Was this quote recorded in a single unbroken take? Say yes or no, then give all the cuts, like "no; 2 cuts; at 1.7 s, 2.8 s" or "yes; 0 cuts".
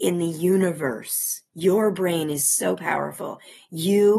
no; 1 cut; at 1.5 s